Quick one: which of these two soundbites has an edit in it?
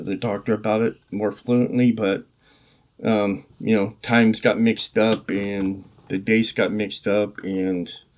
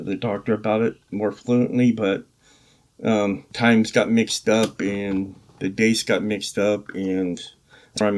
second; 1 cut; at 3.5 s

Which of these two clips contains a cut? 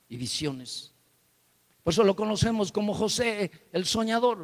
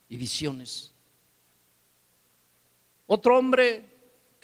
first; 1 cut; at 1.7 s

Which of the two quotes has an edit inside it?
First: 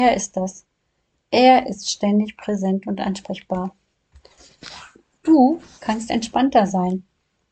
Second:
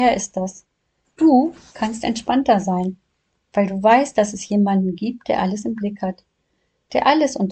second; 1 cut; at 1.0 s

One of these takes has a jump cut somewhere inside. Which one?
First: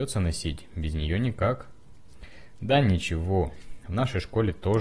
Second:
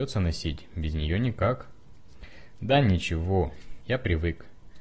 second; 1 cut; at 3.8 s

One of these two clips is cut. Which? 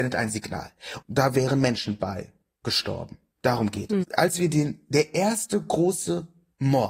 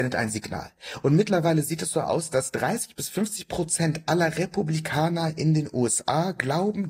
first; 2 cuts; at 1.0 s, 4.0 s

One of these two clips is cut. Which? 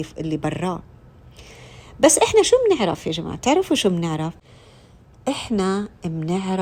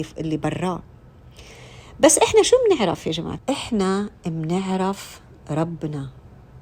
second; 1 cut; at 3.4 s

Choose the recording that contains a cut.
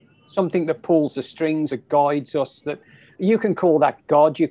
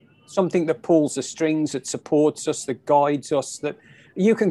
first; 1 cut; at 1.7 s

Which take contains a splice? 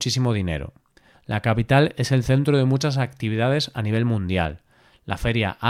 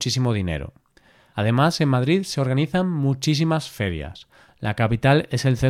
first; 1 cut; at 1.1 s

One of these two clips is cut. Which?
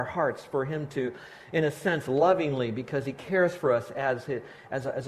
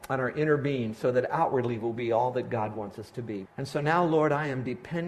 second; 1 cut; at 3.4 s

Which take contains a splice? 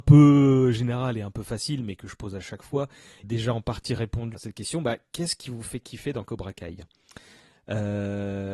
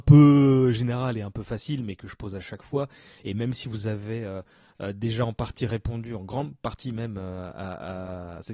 first; 2 cuts; at 3.2 s, 4.3 s

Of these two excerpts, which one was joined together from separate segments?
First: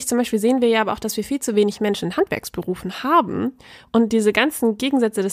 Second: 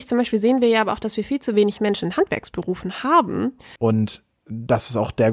second; 1 cut; at 3.8 s

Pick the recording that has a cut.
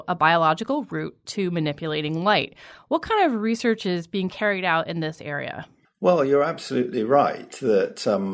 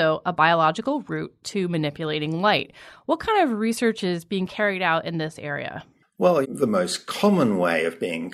second; 1 cut; at 6.4 s

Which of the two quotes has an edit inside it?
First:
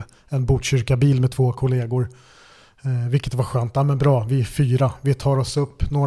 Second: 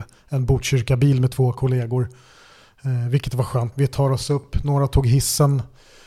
second; 1 cut; at 3.7 s

